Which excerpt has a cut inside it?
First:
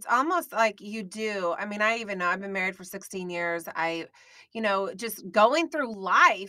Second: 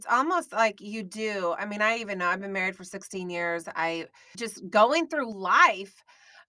second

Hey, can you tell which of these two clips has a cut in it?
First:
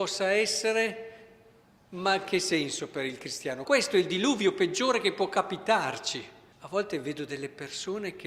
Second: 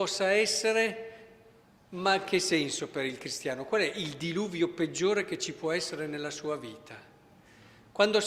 first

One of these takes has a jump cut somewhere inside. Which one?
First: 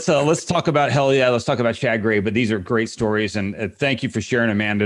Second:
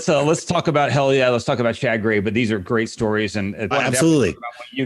second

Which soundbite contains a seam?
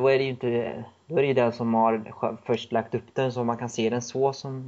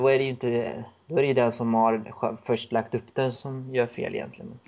second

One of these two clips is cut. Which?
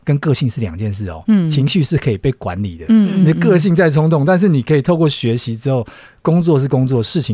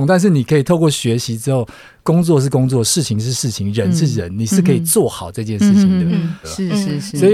second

